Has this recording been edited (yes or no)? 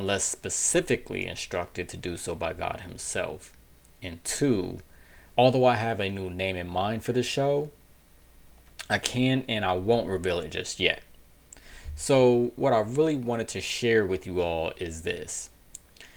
yes